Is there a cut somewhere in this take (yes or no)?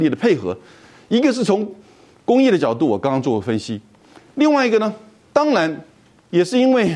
no